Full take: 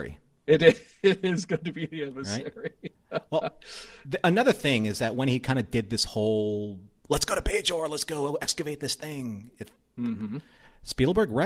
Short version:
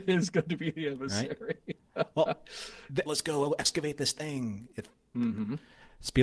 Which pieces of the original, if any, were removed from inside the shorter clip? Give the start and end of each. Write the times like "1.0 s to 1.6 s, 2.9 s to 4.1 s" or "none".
4.2 s to 7.9 s